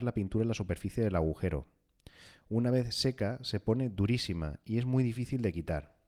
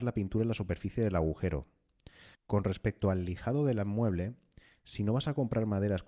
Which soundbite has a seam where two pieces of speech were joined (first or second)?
second